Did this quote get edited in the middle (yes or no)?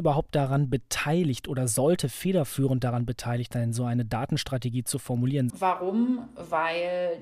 yes